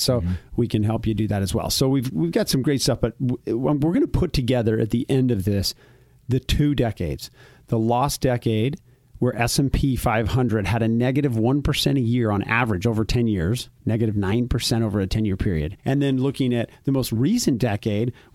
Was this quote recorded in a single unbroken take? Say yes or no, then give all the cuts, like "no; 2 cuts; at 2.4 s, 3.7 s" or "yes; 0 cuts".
no; 2 cuts; at 13.8 s, 15.8 s